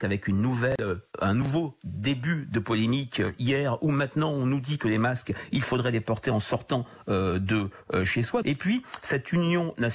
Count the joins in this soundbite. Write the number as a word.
one